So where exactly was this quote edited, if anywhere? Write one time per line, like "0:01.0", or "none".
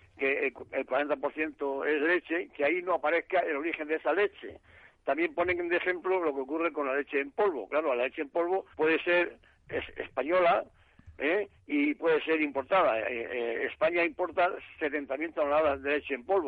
0:08.7